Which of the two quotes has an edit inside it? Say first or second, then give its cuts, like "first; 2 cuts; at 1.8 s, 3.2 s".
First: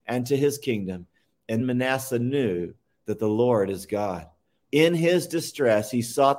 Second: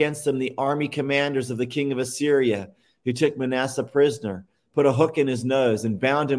first; 2 cuts; at 1.6 s, 4.6 s